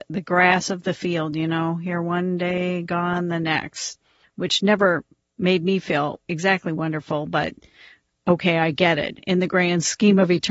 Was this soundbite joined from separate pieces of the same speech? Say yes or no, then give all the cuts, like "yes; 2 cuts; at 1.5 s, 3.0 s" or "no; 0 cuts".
no; 0 cuts